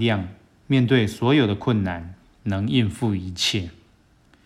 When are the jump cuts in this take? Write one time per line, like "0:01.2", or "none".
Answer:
0:02.4